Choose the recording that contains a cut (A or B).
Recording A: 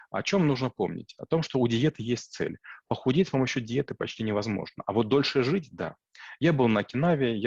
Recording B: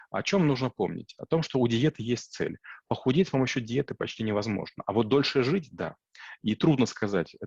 B